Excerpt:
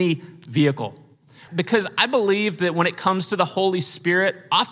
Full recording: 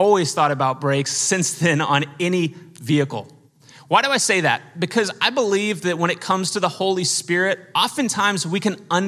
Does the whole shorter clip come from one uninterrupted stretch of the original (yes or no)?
no